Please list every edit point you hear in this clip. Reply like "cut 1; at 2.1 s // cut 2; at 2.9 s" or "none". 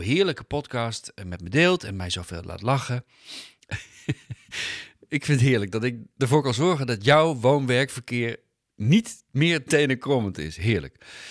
cut 1; at 3.6 s